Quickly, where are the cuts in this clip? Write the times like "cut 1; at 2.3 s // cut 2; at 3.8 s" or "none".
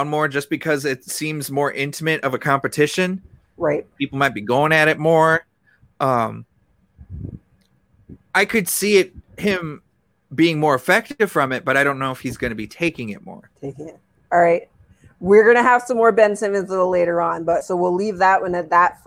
none